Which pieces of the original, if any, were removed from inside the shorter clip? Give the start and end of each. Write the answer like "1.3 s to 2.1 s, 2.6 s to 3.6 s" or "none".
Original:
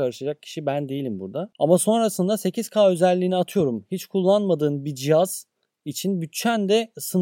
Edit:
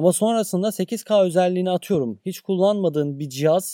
none